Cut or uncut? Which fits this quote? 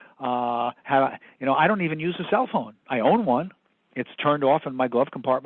uncut